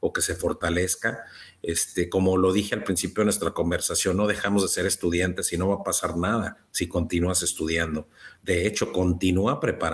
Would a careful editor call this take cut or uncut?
cut